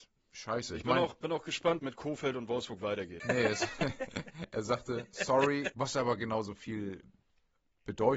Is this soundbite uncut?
no; 3 cuts; at 1.8 s, 3.2 s, 5.7 s

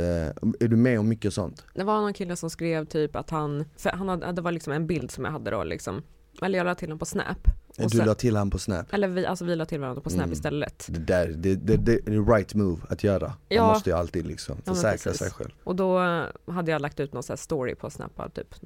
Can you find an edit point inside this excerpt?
no; 0 cuts

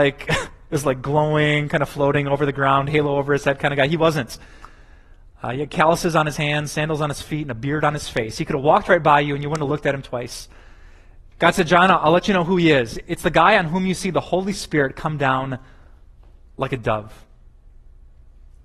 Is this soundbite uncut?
no; 1 cut; at 11.4 s

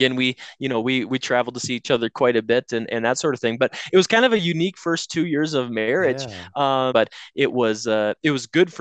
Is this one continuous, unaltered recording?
no; 1 cut; at 6.9 s

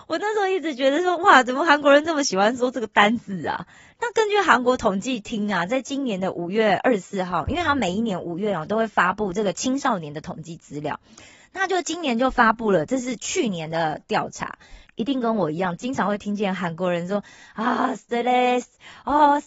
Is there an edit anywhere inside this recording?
yes; 1 cut; at 14.8 s

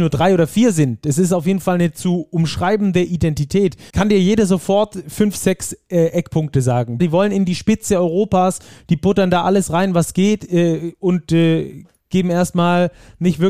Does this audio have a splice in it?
yes; 2 cuts; at 3.9 s, 7.0 s

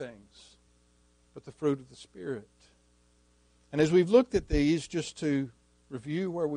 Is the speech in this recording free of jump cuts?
yes; 0 cuts

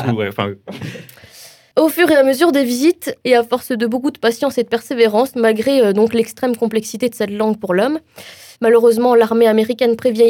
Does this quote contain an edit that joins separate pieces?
yes; 2 cuts; at 5.3 s, 8.5 s

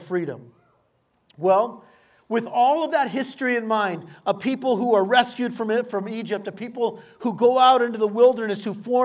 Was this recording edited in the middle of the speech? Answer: no; 0 cuts

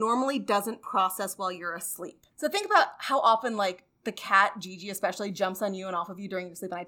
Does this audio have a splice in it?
no; 0 cuts

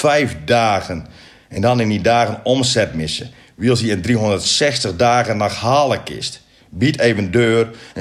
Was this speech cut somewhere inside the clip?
yes; 1 cut; at 6.6 s

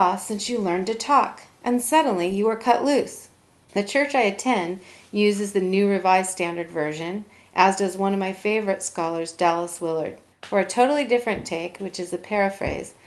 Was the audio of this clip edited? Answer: yes; 3 cuts; at 3.7 s, 10.3 s, 11.8 s

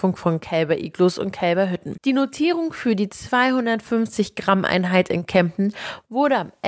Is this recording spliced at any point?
yes; 1 cut; at 2.0 s

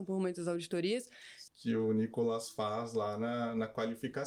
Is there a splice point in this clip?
yes; 1 cut; at 1.5 s

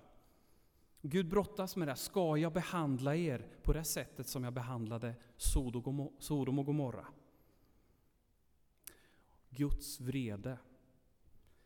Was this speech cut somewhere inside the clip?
yes; 1 cut; at 9.4 s

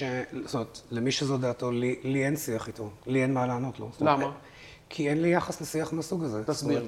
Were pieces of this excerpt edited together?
no; 0 cuts

